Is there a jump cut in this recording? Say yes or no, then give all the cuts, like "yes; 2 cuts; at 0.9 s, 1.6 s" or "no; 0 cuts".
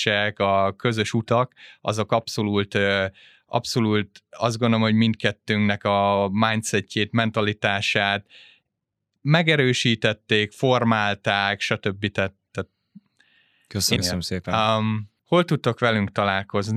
yes; 2 cuts; at 14.0 s, 15.2 s